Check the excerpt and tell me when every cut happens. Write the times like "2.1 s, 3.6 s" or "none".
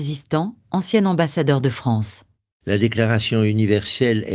none

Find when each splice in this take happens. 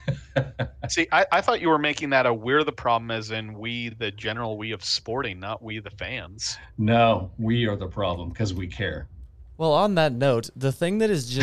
none

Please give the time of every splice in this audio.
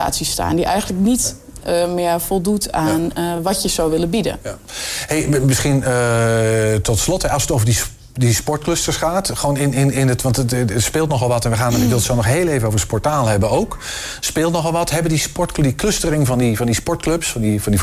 none

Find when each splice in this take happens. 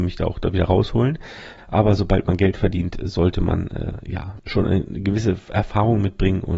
1.6 s

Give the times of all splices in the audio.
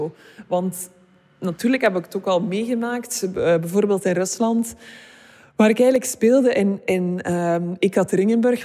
none

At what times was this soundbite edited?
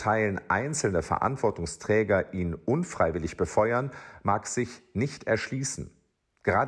none

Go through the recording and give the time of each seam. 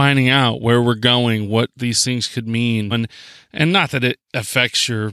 2.9 s

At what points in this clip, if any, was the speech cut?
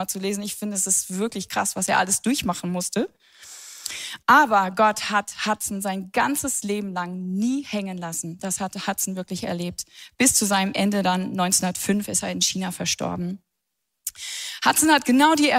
none

